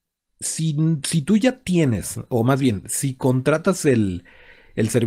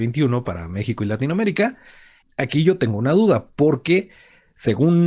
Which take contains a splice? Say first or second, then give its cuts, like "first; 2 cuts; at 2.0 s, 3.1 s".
second; 1 cut; at 2.2 s